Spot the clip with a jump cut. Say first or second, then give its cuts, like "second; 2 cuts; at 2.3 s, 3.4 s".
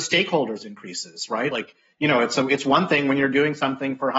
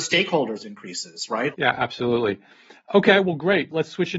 second; 1 cut; at 1.5 s